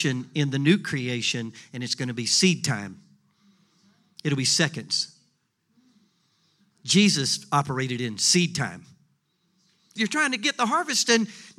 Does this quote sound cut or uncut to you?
cut